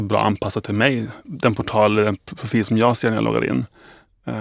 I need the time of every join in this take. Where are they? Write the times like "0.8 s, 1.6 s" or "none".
1.2 s

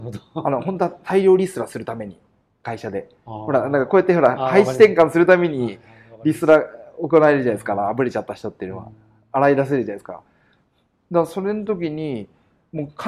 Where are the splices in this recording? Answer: none

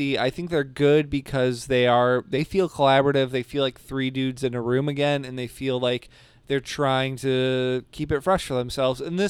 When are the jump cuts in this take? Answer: none

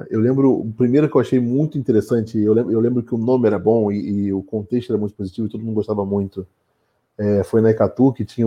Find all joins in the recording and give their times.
none

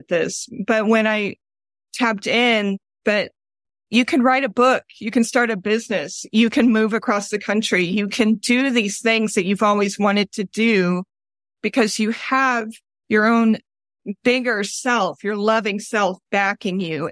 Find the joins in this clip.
3.0 s

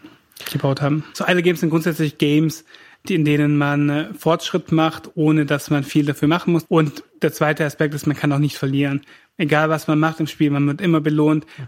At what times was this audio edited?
1.1 s, 6.6 s

